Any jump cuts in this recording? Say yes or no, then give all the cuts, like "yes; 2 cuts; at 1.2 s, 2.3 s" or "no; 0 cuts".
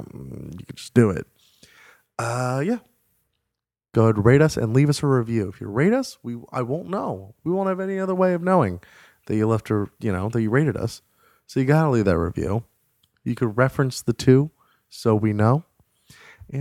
no; 0 cuts